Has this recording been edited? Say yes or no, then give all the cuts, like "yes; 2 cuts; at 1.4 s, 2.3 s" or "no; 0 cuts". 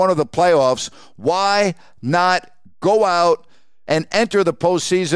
yes; 1 cut; at 3.9 s